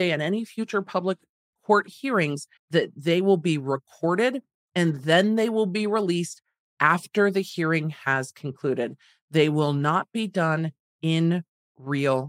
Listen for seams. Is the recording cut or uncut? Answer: cut